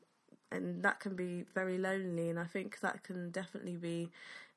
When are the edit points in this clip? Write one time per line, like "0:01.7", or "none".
none